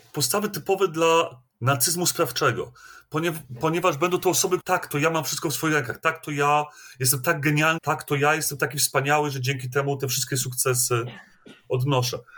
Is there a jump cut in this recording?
yes; 2 cuts; at 4.6 s, 7.8 s

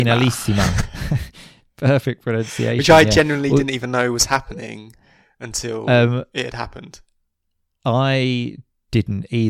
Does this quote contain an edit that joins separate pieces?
no; 0 cuts

